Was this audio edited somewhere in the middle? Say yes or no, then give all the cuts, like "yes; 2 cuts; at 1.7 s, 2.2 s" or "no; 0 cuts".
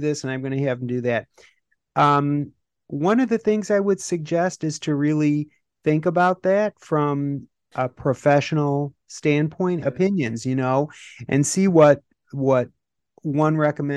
yes; 1 cut; at 9.8 s